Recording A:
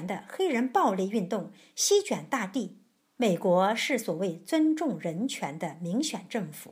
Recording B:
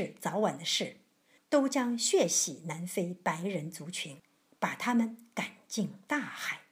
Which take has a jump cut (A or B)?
A